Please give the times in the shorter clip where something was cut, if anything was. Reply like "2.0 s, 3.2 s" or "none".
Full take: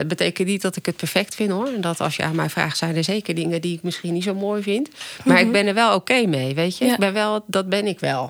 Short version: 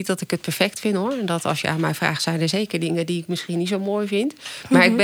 none